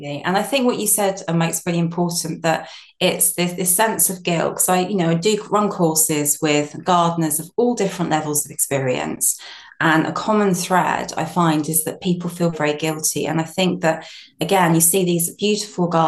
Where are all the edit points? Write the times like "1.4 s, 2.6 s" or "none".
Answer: 12.5 s